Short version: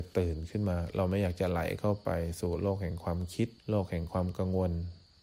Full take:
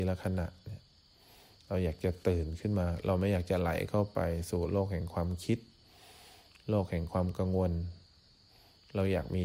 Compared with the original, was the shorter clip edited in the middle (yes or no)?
yes